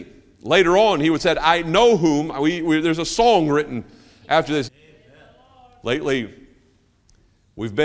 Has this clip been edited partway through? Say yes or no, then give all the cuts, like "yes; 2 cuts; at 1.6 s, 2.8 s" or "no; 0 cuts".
yes; 1 cut; at 4.6 s